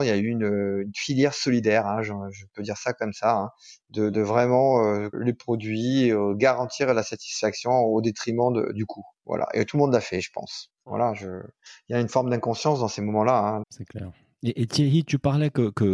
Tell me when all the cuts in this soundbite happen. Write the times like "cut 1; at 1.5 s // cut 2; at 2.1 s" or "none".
cut 1; at 5.1 s // cut 2; at 10.7 s // cut 3; at 13.6 s